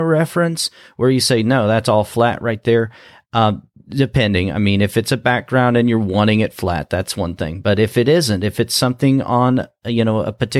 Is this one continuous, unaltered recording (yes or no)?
yes